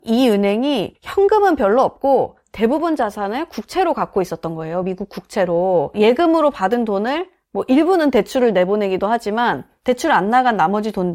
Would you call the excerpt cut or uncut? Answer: uncut